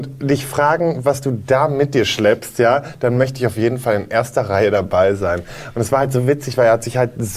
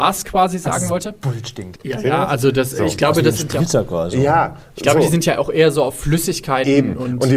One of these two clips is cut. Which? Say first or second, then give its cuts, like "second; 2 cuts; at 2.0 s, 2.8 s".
second; 1 cut; at 1.7 s